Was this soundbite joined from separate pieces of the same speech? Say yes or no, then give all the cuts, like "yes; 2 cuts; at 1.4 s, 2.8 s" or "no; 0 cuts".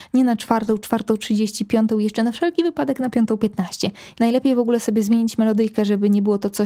yes; 1 cut; at 4.1 s